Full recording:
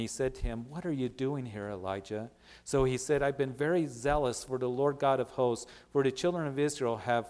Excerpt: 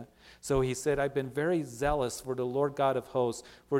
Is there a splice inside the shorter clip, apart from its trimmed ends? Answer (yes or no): no